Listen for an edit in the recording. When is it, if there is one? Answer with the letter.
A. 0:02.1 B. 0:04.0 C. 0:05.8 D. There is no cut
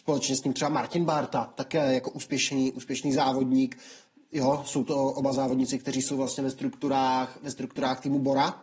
D